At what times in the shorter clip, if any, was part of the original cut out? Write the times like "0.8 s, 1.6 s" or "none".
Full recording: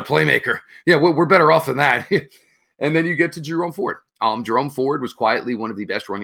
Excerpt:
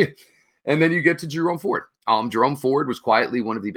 none